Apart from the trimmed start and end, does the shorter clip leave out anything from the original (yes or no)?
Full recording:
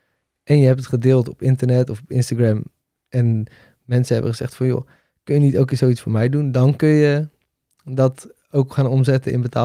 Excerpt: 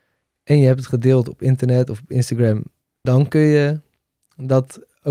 yes